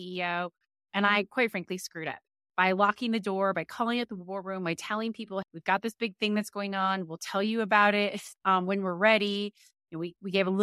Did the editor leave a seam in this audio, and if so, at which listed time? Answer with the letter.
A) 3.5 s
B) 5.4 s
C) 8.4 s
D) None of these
B